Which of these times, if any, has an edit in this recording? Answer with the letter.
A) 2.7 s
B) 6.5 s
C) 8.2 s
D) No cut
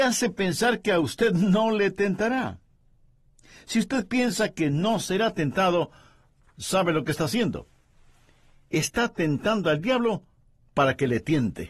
D